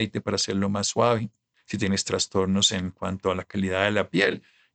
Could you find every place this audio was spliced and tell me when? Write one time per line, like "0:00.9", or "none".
none